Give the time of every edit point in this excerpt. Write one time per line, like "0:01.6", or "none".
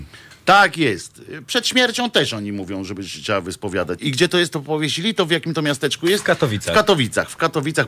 0:04.0

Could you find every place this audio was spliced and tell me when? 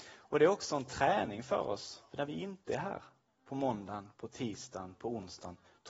none

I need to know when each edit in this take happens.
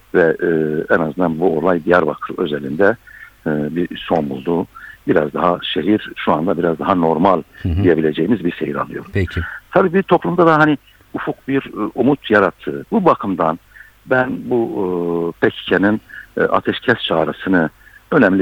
none

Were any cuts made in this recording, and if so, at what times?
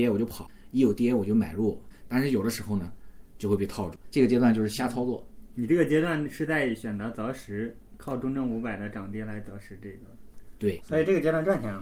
0:02.0
0:04.0
0:10.8

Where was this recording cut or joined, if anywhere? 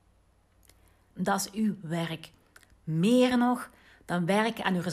0:01.1

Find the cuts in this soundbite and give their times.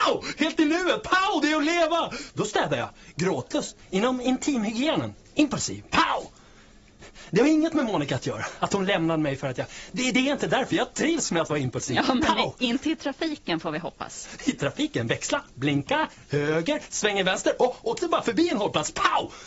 0:02.3
0:03.8

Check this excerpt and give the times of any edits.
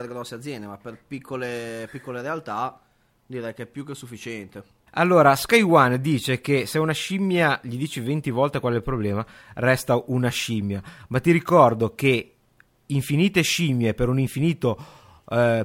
0:04.9

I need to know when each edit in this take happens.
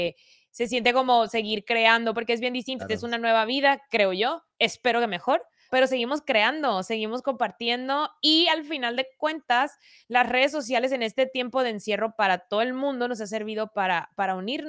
0:02.8
0:05.7

